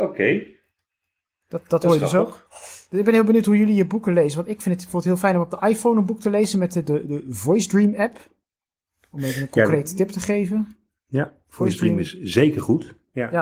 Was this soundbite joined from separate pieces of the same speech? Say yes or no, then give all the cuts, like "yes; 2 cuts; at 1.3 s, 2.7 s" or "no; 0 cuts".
no; 0 cuts